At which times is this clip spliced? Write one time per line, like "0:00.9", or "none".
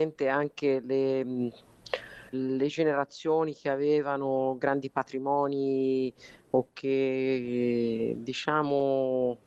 0:02.3